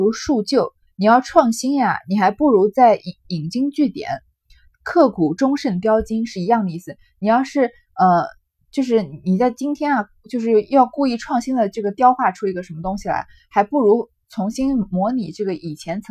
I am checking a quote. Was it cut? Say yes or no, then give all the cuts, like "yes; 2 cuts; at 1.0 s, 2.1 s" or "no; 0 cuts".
no; 0 cuts